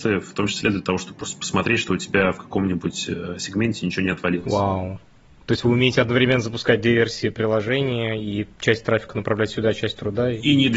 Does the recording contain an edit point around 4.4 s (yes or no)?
no